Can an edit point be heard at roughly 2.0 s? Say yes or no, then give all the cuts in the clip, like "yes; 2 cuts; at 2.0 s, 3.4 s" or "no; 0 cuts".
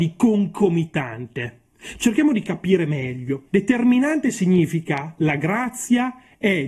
no; 1 cut; at 3.5 s